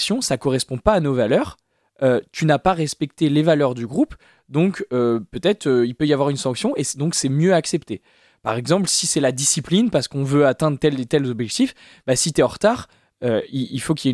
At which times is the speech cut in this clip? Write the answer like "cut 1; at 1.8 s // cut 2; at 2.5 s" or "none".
none